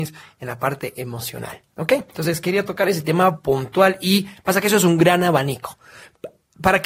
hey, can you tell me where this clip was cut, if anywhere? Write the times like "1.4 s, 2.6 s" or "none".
none